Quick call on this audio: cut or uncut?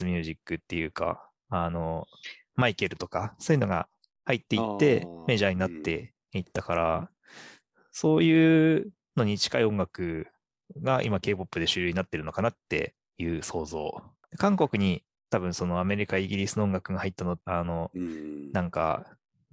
cut